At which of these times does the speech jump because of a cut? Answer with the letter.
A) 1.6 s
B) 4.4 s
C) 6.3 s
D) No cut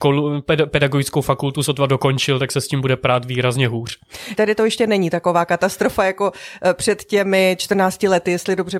B